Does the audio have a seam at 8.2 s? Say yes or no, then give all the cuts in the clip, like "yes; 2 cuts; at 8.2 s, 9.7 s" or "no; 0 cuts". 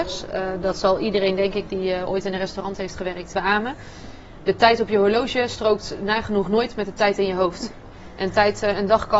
no; 1 cut; at 3.3 s